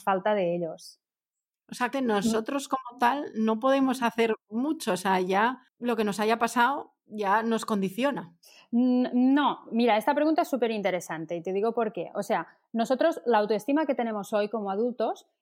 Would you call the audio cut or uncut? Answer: cut